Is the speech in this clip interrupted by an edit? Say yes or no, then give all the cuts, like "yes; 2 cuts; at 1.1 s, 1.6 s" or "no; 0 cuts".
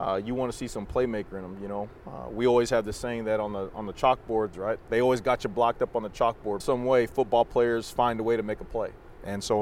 yes; 2 cuts; at 4.5 s, 6.6 s